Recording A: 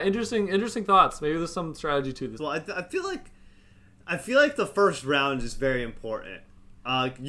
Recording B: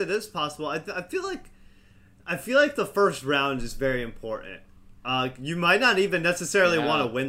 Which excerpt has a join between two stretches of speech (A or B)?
A